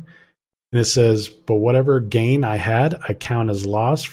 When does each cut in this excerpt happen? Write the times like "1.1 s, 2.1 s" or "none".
none